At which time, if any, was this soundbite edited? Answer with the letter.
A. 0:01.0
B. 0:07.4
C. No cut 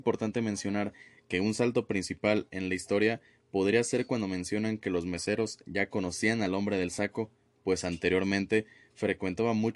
C